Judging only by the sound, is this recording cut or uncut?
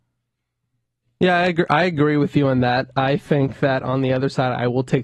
uncut